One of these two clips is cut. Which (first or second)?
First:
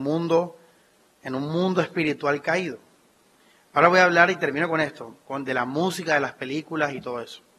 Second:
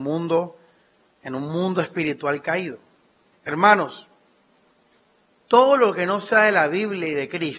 second